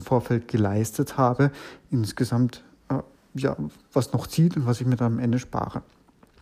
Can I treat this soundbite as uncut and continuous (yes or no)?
yes